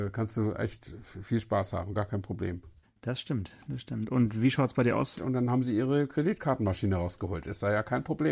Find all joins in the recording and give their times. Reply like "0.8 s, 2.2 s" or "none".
2.8 s, 5.2 s